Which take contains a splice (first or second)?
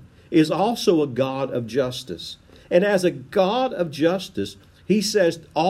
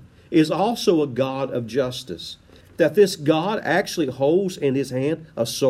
second